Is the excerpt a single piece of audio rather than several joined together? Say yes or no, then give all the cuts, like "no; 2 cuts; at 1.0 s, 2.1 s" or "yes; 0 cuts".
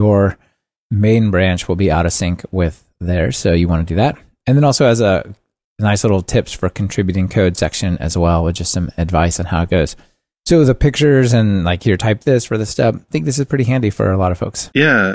yes; 0 cuts